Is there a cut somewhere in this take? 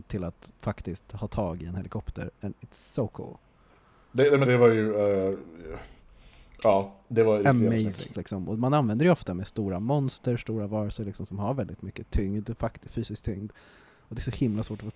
yes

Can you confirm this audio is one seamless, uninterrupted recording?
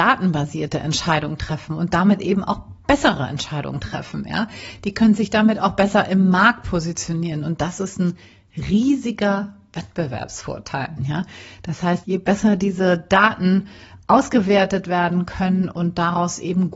no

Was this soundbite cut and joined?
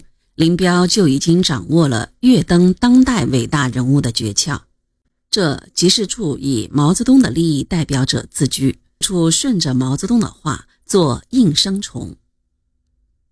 yes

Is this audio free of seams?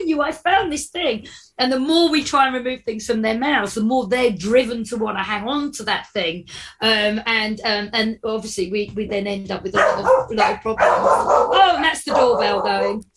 yes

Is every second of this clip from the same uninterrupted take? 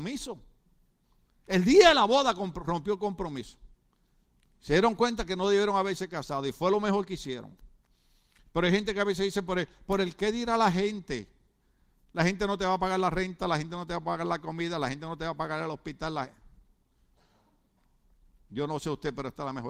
yes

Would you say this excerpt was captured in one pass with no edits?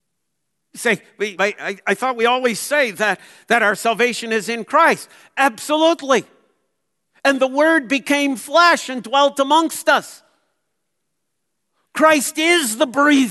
no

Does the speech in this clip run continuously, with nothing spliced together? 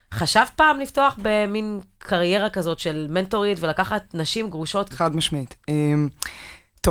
no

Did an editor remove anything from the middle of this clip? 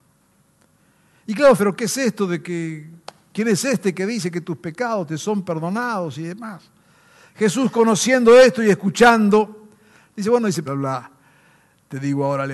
yes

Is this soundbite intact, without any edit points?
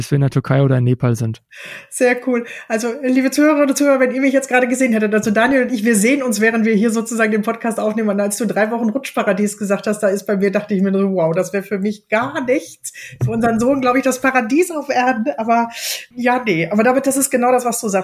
yes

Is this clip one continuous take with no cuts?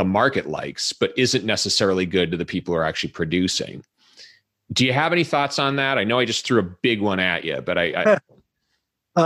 yes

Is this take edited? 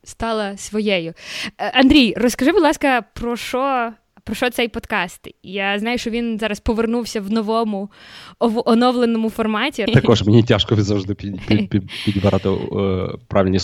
yes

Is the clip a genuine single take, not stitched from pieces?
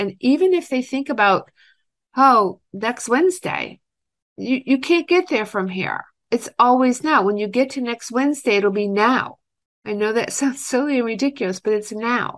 yes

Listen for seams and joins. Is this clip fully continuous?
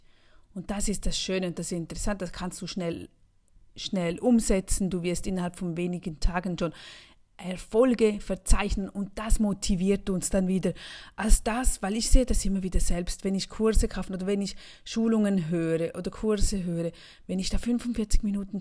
yes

